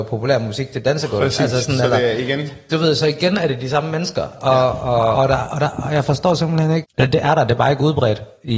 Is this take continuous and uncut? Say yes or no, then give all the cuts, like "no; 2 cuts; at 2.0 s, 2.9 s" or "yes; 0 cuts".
no; 2 cuts; at 5.1 s, 6.8 s